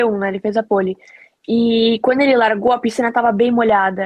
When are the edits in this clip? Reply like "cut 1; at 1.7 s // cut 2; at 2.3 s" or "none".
none